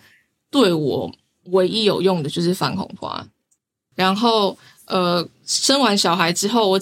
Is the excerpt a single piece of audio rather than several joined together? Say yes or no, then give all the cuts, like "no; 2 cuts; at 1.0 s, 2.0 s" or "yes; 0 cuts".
no; 1 cut; at 3.9 s